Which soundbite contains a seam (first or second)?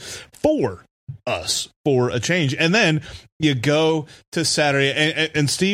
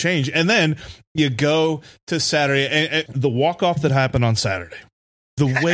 second